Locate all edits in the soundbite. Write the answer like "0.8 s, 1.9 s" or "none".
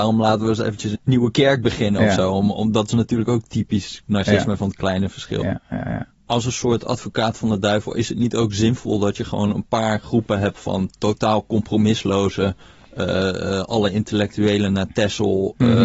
1.0 s